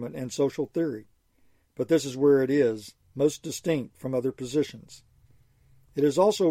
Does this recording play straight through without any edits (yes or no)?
no